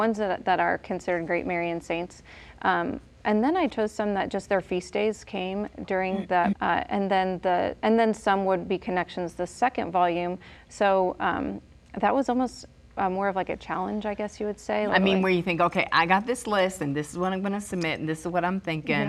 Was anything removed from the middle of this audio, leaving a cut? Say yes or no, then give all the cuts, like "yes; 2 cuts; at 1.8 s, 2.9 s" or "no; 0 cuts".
yes; 2 cuts; at 6.5 s, 14.9 s